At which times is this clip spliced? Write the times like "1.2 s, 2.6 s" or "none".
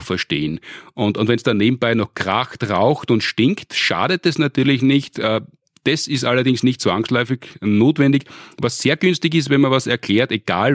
none

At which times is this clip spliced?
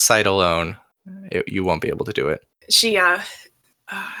none

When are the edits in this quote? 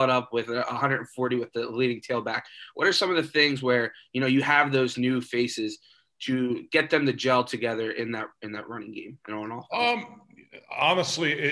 none

